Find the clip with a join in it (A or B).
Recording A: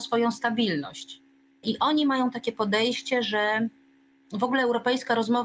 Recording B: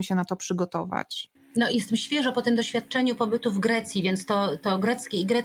A